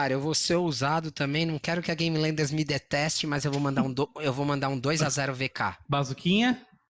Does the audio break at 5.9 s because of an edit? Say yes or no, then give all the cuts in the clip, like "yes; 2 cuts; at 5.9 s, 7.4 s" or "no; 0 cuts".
yes; 1 cut; at 5.9 s